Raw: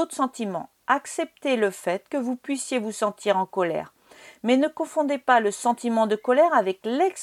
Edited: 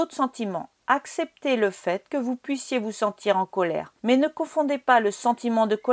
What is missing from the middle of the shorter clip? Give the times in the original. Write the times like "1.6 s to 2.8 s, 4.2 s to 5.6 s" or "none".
4.0 s to 4.4 s